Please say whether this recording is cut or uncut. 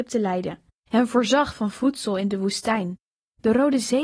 uncut